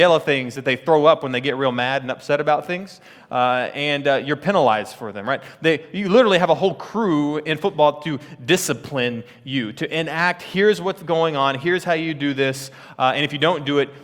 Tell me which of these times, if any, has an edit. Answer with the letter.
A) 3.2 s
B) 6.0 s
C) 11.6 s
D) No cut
D